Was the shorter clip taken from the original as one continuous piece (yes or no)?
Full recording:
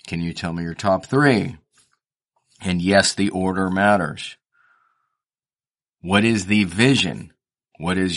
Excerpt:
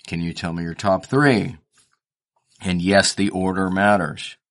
yes